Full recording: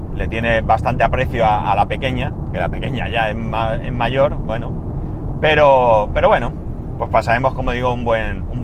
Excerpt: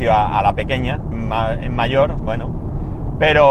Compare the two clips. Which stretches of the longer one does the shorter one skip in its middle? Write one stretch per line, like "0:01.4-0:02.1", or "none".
0:02.4-0:03.3